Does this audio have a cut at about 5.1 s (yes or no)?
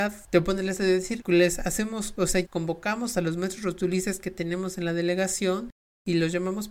no